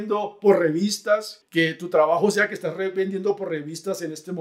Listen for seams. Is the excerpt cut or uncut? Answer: cut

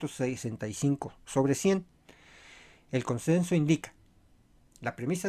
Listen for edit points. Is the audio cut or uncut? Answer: uncut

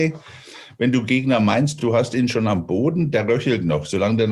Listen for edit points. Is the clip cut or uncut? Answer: uncut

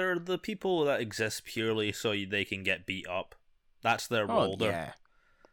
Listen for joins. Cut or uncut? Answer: uncut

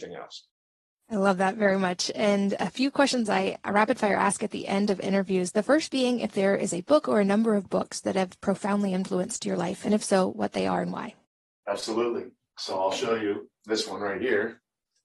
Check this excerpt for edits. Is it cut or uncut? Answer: uncut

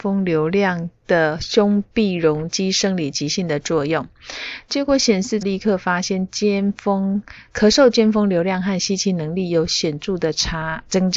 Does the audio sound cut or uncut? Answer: cut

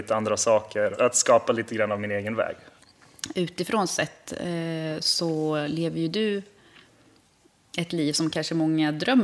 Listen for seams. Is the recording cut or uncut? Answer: uncut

